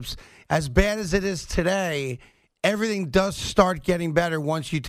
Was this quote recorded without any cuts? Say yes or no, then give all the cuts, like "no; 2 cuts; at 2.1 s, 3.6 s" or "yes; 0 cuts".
yes; 0 cuts